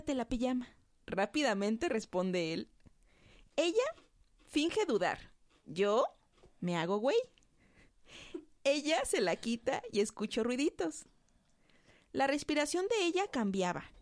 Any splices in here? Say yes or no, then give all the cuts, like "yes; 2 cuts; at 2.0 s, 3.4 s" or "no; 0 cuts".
no; 0 cuts